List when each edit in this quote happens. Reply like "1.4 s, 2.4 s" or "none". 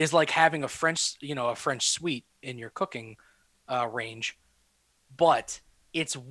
none